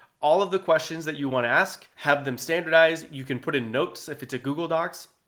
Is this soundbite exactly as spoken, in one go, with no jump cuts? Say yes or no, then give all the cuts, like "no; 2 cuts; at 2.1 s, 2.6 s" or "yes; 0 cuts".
no; 1 cut; at 1.9 s